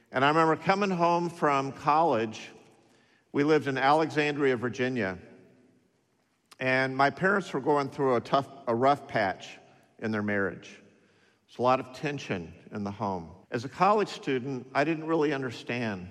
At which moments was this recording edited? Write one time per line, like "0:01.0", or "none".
0:08.6
0:13.4